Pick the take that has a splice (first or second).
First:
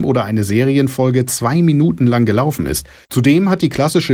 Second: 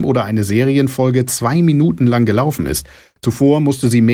first